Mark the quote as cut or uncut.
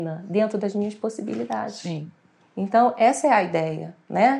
uncut